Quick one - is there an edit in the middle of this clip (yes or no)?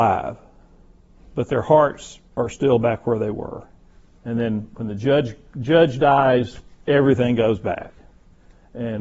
yes